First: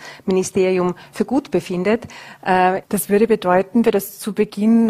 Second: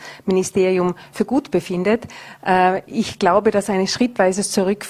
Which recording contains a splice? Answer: first; 2 cuts; at 2.8 s, 3.8 s

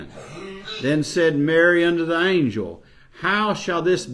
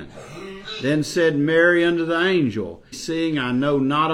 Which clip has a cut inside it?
second; 1 cut; at 2.9 s

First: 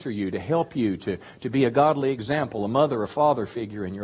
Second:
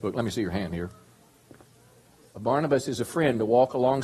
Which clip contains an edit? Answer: second; 1 cut; at 2.3 s

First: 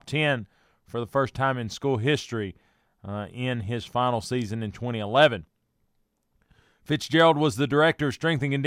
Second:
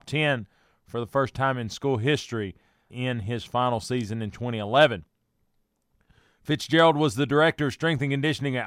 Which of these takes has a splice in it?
second; 1 cut; at 2.9 s

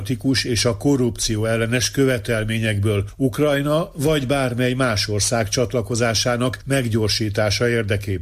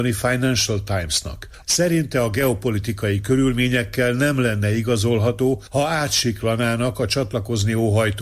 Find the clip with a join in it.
second; 1 cut; at 1.6 s

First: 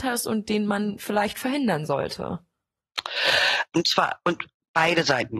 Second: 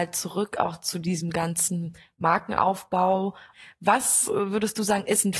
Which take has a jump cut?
first; 1 cut; at 3.7 s

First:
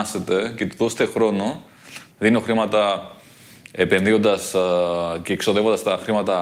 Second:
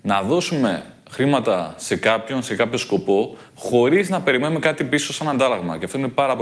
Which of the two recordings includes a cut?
first; 1 cut; at 2.1 s

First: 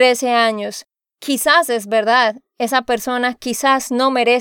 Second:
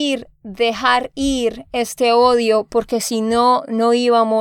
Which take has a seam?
first; 1 cut; at 1.0 s

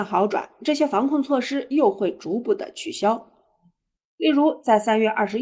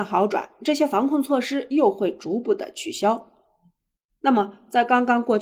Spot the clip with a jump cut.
second; 1 cut; at 4.1 s

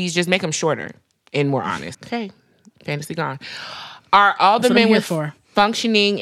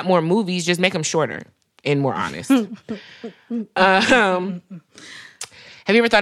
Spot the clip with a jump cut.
first; 1 cut; at 1.9 s

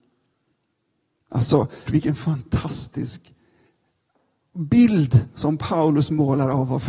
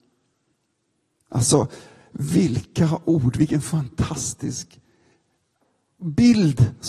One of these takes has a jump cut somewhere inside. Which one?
first; 1 cut; at 1.9 s

